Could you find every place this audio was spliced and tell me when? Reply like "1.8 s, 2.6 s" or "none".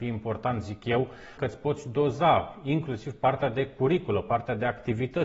1.4 s